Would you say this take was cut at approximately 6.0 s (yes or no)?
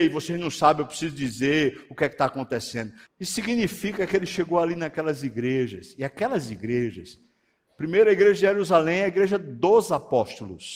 no